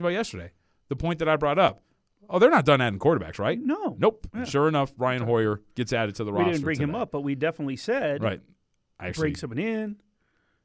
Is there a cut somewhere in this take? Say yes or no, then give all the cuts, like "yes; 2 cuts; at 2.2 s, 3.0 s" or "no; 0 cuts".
no; 0 cuts